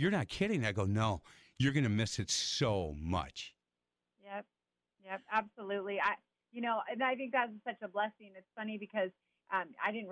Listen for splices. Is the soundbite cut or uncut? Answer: uncut